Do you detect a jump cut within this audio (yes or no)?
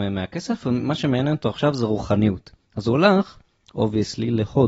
no